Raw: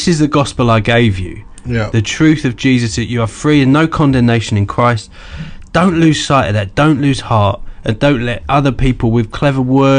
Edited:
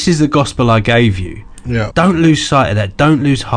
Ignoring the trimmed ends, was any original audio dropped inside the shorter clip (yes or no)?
yes